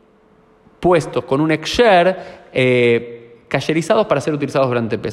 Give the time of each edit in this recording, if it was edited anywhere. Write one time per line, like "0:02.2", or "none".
none